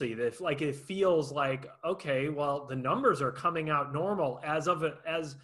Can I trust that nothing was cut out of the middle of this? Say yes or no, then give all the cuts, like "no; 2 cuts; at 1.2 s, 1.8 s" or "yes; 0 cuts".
yes; 0 cuts